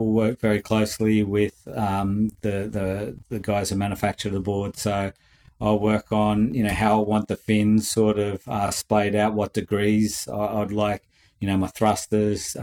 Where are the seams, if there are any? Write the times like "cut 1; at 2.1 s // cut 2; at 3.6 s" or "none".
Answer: none